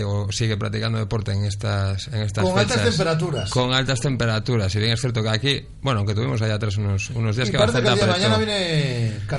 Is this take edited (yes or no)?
no